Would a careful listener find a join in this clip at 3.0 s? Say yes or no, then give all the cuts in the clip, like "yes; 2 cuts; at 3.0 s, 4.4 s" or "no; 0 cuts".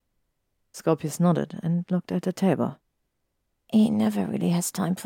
no; 0 cuts